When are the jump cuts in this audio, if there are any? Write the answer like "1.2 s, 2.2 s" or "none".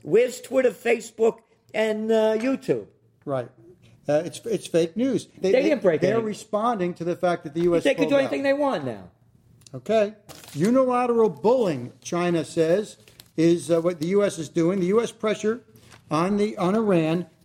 5.4 s